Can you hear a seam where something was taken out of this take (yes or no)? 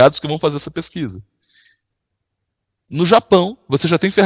no